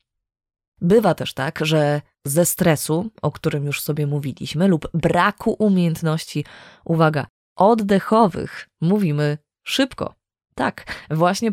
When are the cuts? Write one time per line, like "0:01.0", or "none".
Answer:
none